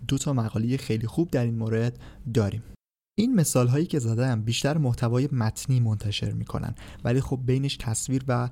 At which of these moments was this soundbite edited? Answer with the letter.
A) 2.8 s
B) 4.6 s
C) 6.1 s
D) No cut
D